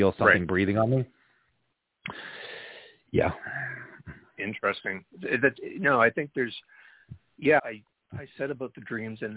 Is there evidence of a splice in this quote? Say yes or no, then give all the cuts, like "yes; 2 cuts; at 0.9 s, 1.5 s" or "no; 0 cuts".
yes; 1 cut; at 7.6 s